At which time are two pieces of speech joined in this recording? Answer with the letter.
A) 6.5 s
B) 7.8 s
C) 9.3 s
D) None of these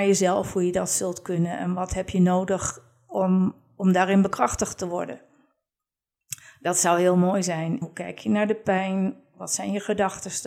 B